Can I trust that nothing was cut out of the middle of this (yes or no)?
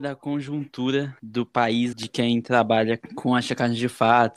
no